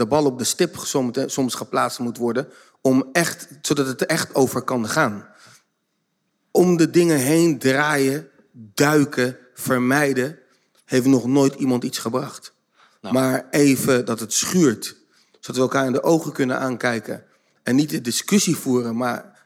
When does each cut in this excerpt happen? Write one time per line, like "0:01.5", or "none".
none